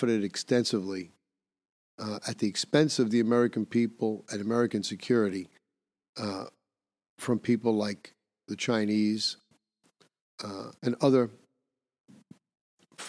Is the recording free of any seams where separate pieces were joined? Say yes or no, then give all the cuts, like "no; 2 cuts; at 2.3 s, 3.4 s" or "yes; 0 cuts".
no; 1 cut; at 10.8 s